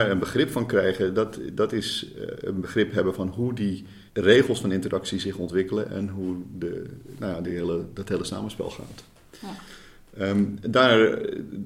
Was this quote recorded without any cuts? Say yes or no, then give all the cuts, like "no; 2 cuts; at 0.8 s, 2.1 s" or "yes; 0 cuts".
no; 1 cut; at 4.1 s